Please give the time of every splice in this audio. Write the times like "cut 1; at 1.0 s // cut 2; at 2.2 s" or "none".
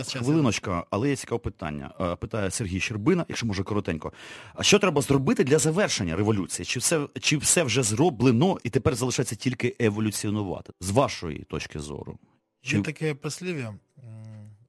cut 1; at 8.6 s // cut 2; at 10.7 s